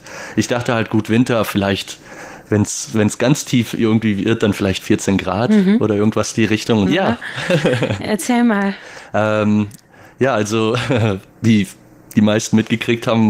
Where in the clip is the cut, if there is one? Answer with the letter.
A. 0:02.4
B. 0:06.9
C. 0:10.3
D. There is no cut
B